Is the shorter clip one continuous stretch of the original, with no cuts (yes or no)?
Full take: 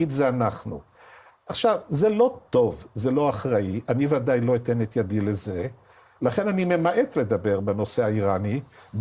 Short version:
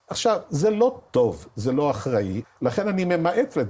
no